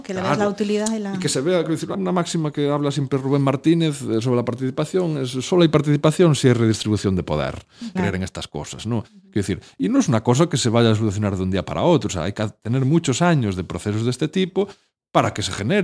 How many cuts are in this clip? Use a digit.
2